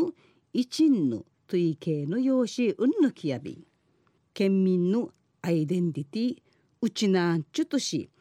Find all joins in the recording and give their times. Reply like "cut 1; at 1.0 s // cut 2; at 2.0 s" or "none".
cut 1; at 4.2 s